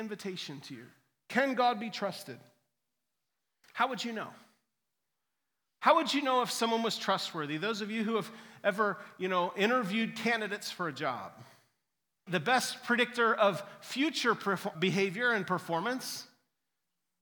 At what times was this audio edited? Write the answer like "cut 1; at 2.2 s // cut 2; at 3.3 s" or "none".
cut 1; at 12.3 s // cut 2; at 14.7 s